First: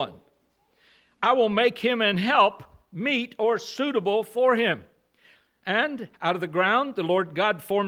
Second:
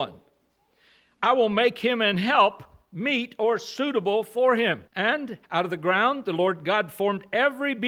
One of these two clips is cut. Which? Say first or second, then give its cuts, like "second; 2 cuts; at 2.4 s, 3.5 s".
second; 1 cut; at 4.9 s